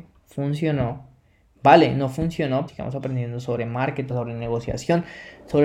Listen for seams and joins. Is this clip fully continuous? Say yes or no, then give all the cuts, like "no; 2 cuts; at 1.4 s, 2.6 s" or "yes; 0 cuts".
no; 2 cuts; at 2.7 s, 4.1 s